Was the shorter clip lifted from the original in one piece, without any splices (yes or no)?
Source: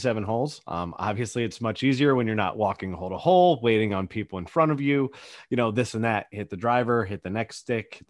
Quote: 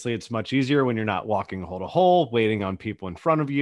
yes